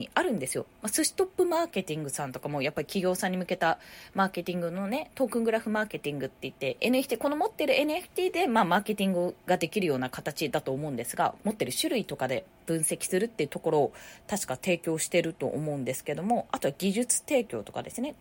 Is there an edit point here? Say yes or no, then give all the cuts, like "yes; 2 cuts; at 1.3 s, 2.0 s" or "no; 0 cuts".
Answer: yes; 2 cuts; at 6.8 s, 11.4 s